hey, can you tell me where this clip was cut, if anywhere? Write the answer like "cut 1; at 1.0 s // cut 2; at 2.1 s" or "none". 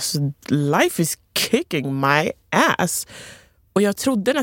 none